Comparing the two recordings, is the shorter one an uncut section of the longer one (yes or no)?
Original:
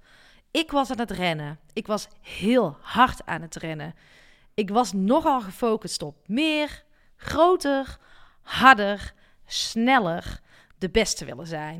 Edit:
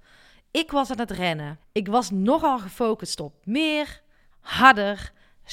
no